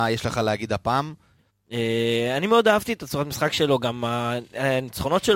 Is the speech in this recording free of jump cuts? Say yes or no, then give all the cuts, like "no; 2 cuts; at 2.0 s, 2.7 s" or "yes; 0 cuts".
no; 1 cut; at 1.5 s